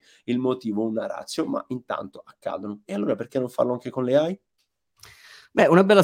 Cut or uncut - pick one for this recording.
uncut